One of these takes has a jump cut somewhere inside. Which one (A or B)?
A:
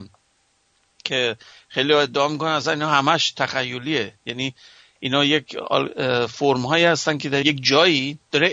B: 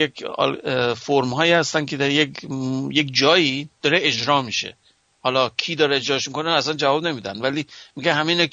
A